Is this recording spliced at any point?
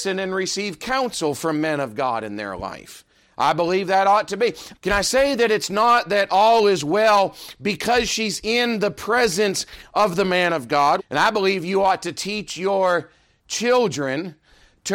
yes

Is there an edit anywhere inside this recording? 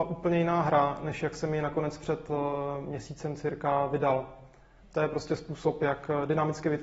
yes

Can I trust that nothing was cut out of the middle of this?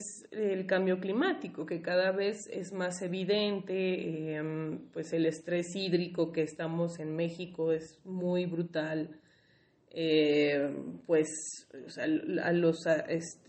yes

